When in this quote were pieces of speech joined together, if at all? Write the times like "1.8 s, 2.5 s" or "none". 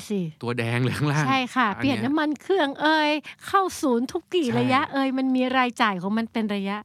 4.2 s